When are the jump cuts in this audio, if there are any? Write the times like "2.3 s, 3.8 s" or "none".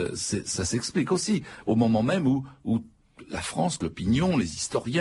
none